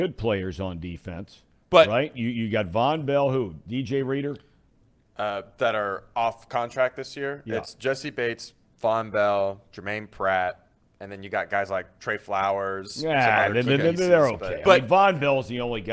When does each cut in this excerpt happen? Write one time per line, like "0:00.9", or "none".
none